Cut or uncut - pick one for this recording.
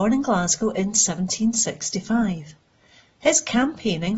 uncut